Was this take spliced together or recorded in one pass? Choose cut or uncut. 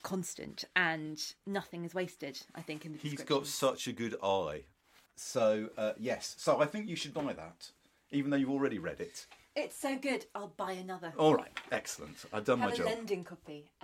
uncut